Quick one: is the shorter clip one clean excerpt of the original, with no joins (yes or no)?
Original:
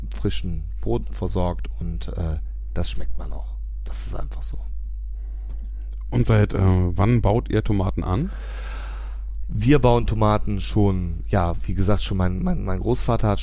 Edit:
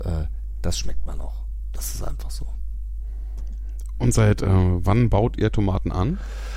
yes